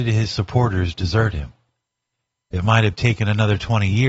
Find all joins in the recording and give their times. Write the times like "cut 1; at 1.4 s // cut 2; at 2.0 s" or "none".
none